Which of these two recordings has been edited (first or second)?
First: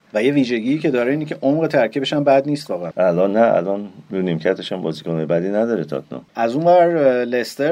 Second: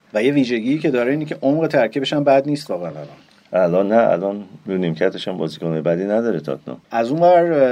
first